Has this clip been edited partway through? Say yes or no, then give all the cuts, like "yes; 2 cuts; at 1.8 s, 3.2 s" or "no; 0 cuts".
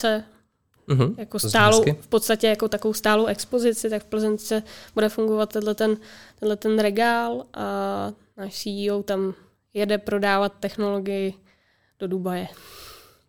no; 0 cuts